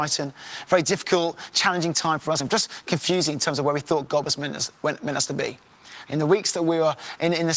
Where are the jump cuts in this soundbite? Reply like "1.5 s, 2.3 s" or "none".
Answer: 2.4 s, 6.0 s